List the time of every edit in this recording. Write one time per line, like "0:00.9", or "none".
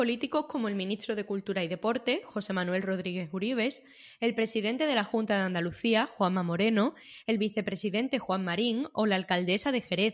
none

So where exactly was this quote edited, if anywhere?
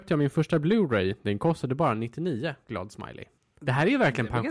none

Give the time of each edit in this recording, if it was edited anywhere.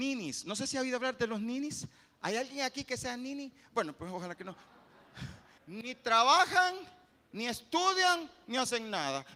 0:05.6

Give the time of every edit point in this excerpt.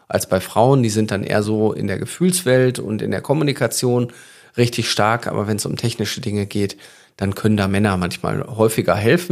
none

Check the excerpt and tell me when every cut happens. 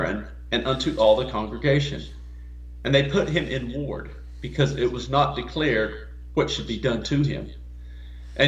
none

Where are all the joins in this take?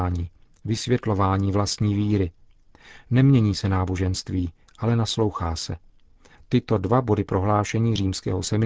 0:06.4

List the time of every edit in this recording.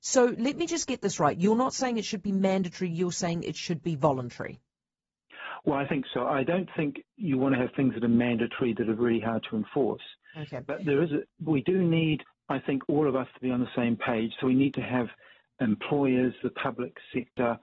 none

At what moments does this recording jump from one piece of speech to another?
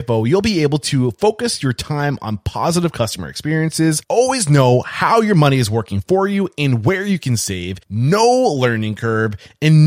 0:07.8

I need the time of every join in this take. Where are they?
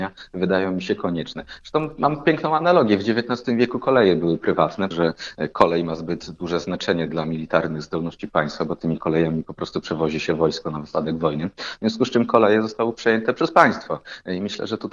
0:04.9

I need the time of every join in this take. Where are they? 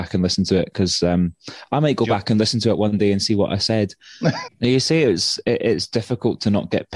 0:04.5

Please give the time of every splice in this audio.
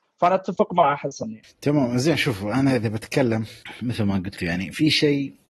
none

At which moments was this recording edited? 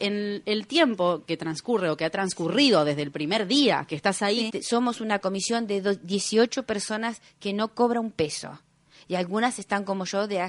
0:04.5

